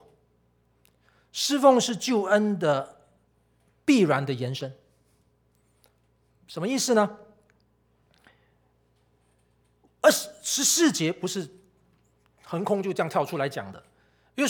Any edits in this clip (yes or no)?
no